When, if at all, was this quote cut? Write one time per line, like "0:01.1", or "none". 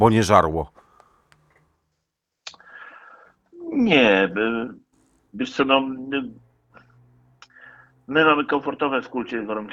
none